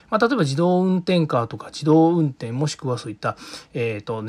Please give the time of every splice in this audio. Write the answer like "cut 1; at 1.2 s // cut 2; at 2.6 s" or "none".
none